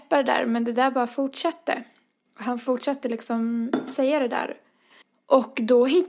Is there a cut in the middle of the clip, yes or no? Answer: no